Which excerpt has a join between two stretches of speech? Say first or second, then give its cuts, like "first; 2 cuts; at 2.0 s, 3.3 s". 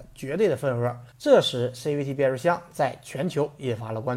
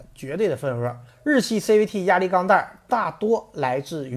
first; 1 cut; at 1.1 s